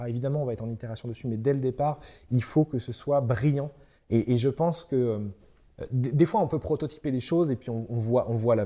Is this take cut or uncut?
uncut